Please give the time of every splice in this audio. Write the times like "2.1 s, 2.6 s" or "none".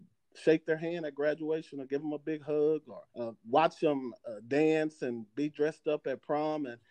3.1 s